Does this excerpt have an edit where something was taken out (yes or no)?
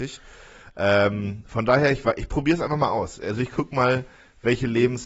no